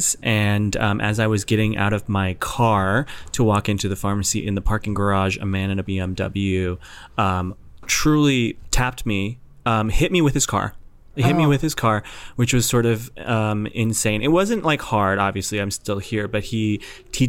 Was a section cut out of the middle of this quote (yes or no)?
no